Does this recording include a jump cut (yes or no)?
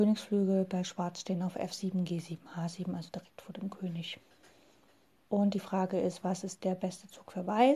yes